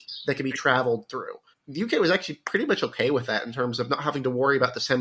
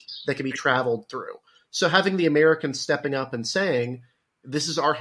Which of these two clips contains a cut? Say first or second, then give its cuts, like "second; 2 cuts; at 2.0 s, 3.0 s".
first; 1 cut; at 1.5 s